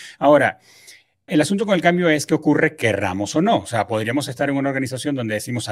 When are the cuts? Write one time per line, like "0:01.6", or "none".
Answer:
0:01.3